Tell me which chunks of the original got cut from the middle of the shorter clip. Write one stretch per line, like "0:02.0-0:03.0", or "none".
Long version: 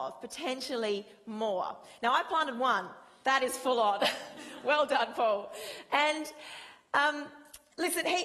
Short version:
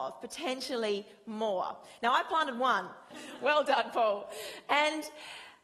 0:03.1-0:04.3